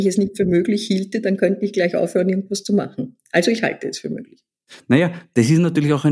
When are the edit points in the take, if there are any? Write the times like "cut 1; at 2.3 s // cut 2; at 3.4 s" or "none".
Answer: none